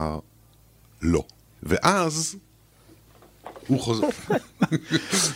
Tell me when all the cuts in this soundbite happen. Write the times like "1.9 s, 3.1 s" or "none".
1.6 s, 4.0 s